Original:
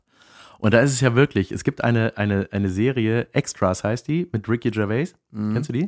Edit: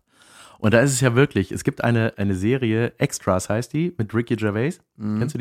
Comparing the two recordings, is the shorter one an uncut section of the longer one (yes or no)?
no